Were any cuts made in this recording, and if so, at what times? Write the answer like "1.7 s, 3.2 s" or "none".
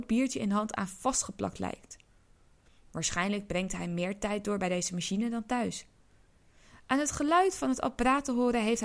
none